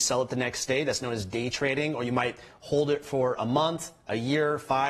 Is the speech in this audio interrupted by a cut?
no; 0 cuts

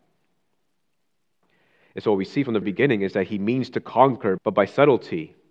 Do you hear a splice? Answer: yes; 2 cuts; at 2.6 s, 4.4 s

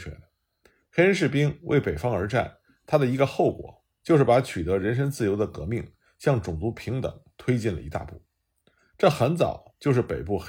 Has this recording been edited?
no; 0 cuts

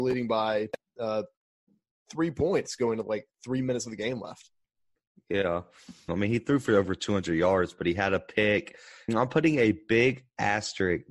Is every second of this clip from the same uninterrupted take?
no; 2 cuts; at 6.1 s, 9.1 s

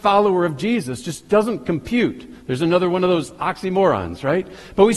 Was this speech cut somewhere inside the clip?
no; 0 cuts

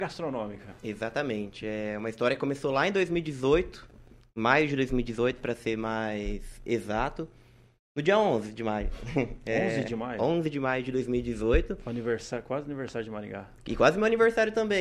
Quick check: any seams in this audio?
no; 0 cuts

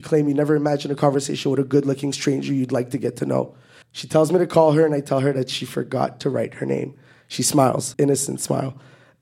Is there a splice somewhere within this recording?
yes; 2 cuts; at 3.8 s, 7.9 s

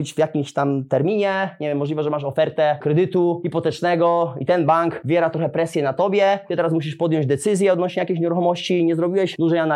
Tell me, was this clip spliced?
no; 0 cuts

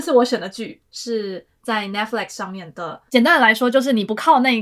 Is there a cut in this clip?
yes; 1 cut; at 3.1 s

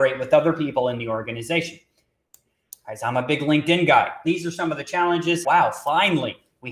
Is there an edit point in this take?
yes; 2 cuts; at 4.2 s, 5.4 s

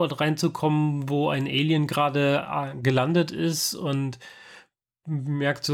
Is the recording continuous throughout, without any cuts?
yes; 0 cuts

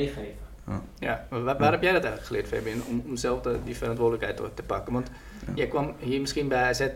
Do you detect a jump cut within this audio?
no; 0 cuts

